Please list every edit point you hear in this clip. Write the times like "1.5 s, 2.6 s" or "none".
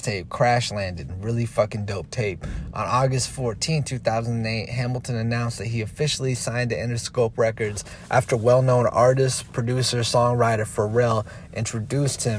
2.7 s